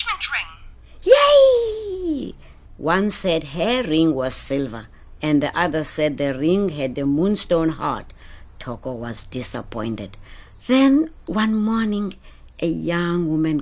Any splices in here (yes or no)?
yes